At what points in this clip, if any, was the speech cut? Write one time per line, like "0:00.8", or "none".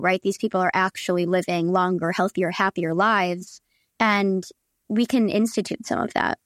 none